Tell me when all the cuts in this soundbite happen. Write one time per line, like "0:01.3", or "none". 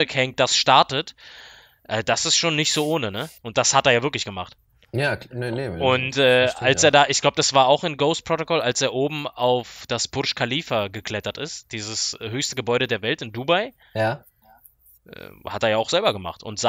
0:03.4